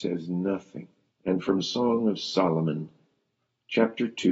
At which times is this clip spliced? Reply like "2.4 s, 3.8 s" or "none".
1.1 s

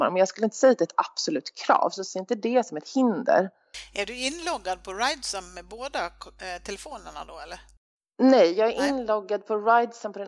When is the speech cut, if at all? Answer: none

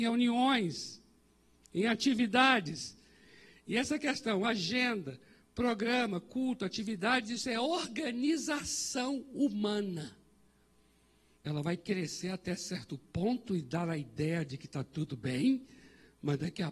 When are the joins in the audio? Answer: 11.4 s

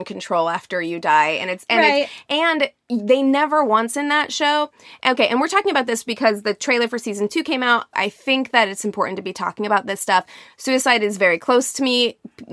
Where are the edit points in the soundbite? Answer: 7.9 s

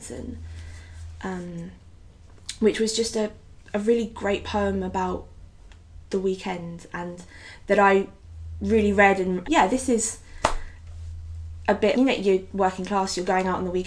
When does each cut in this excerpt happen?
9.4 s, 11.9 s

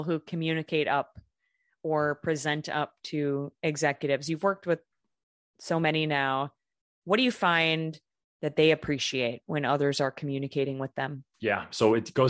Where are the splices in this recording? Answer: 11.3 s

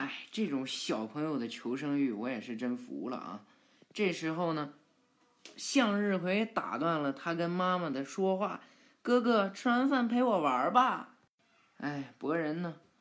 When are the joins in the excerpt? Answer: none

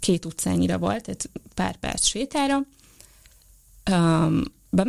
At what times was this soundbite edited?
none

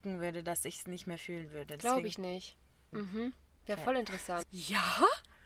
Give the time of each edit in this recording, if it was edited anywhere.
2.9 s, 4.4 s

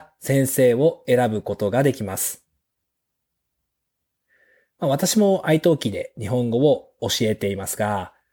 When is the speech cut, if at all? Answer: none

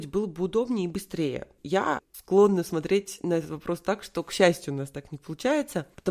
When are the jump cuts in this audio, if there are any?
1.6 s

